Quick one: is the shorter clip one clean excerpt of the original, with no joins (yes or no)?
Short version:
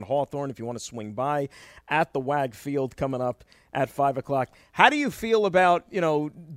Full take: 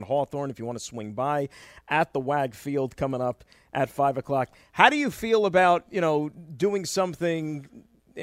yes